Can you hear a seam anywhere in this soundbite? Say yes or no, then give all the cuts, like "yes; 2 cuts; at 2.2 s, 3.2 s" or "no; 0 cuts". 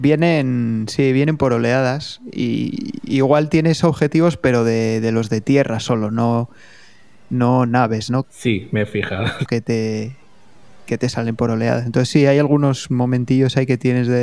yes; 2 cuts; at 8.2 s, 9.5 s